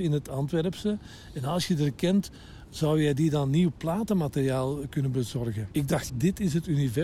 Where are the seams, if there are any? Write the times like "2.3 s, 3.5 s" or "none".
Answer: 6.1 s